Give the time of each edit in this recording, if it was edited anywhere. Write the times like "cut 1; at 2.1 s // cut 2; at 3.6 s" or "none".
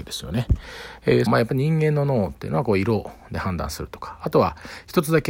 cut 1; at 1.3 s